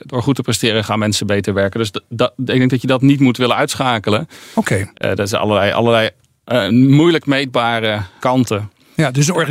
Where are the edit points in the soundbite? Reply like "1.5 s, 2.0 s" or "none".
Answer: 4.9 s, 8.2 s